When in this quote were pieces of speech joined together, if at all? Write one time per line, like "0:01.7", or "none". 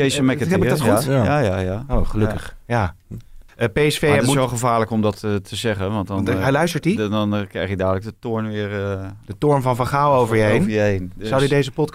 0:03.5